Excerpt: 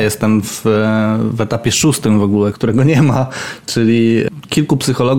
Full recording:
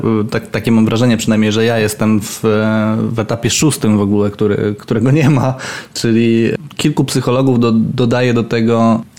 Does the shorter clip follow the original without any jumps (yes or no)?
no